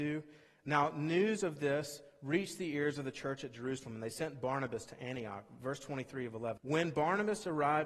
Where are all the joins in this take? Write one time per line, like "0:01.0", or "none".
0:06.6